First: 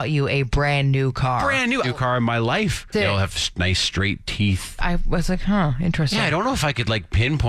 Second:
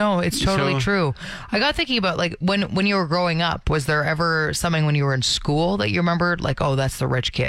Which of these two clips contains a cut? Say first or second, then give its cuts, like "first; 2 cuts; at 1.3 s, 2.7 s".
first; 3 cuts; at 1.8 s, 2.9 s, 4.8 s